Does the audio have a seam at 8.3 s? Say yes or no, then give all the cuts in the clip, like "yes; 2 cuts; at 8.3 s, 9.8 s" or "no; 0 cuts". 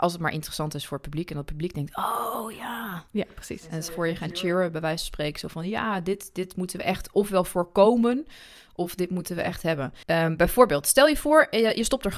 no; 2 cuts; at 3.9 s, 10.0 s